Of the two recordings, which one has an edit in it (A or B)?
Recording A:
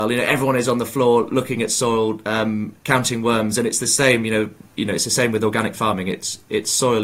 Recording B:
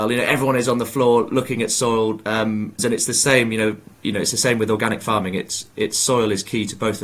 B